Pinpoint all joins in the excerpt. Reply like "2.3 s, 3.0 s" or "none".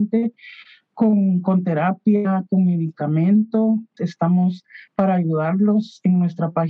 4.0 s

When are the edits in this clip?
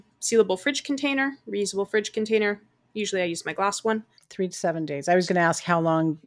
4.1 s, 5.2 s

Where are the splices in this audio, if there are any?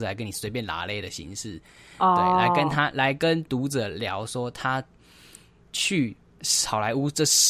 none

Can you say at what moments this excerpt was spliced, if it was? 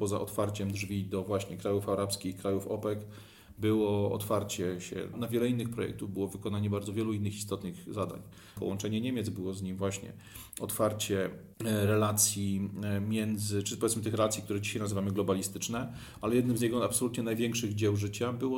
5.1 s, 8.6 s, 11.5 s

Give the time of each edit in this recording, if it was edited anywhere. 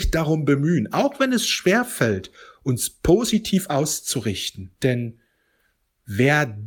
4.8 s

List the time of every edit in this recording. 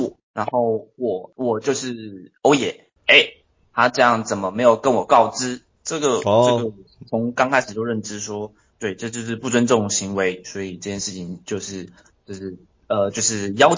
3.0 s, 5.7 s

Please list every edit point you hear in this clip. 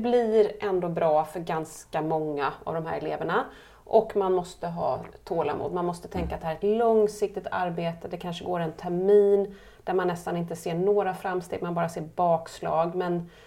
none

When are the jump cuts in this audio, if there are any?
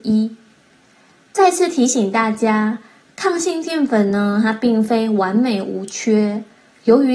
none

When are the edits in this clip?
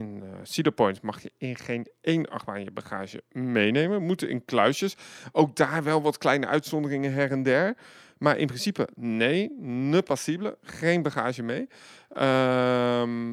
none

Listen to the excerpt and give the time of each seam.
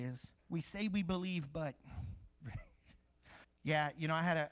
2.4 s, 3.4 s

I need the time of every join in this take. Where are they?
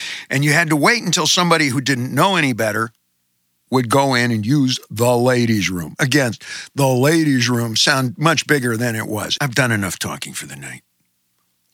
9.4 s

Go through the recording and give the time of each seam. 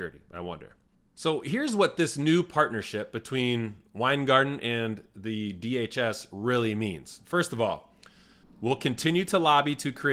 8.4 s

